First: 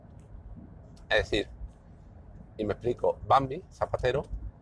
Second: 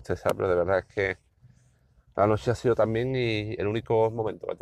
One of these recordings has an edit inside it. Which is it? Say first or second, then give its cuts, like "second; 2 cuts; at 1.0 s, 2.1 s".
first; 1 cut; at 3.2 s